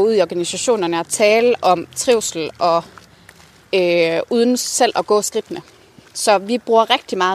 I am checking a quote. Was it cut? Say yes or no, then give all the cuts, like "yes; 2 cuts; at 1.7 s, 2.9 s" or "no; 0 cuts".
no; 0 cuts